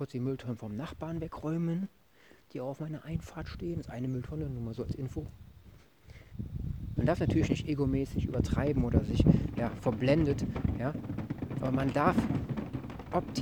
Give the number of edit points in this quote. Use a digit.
2